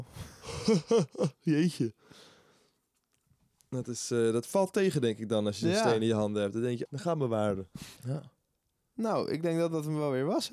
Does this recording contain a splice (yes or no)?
yes